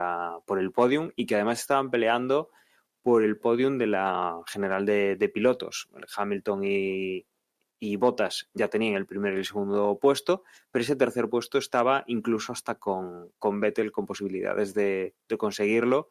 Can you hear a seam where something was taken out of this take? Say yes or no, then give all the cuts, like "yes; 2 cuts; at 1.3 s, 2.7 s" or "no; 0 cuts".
no; 0 cuts